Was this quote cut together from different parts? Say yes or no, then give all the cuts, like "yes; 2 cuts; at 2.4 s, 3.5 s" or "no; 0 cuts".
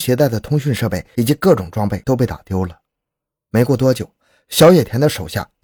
no; 0 cuts